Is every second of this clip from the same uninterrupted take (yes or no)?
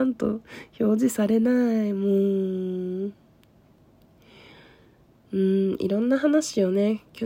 yes